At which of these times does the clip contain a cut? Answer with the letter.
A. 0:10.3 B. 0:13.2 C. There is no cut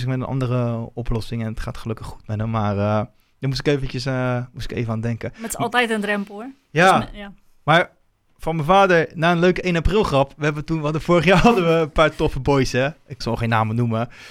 B